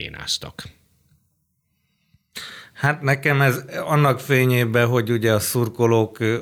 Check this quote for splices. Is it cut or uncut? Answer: uncut